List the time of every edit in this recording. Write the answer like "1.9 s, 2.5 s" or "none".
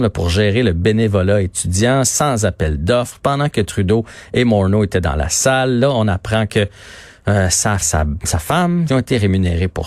7.8 s, 8.9 s

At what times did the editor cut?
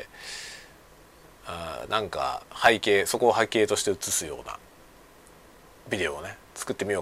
2.5 s

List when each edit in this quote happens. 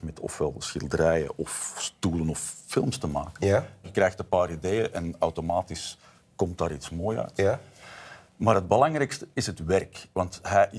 3.8 s

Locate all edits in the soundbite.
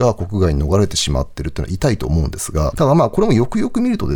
2.7 s

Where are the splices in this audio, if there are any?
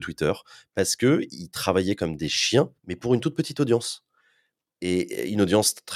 2.8 s

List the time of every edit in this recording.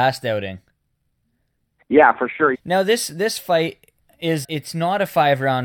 2.5 s, 4.4 s

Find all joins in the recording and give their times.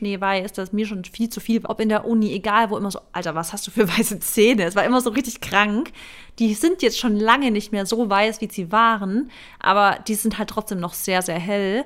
1.6 s

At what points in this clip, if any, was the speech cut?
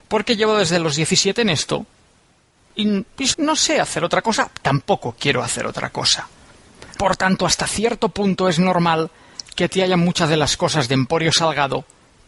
3.3 s, 7.0 s

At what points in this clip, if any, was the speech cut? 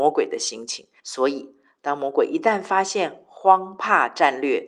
1.0 s

